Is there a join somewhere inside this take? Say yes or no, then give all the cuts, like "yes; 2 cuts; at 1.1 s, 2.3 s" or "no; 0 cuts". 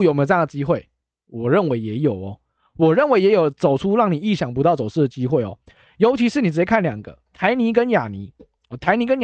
no; 0 cuts